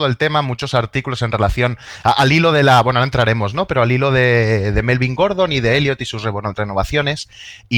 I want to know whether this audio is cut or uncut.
uncut